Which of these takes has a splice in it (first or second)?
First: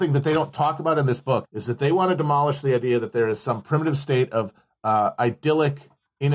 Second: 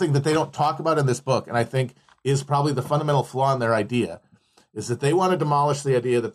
first